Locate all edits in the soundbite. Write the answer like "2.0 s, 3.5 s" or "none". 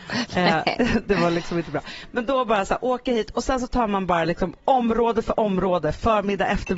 none